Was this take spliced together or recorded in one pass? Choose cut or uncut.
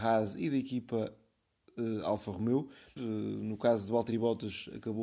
cut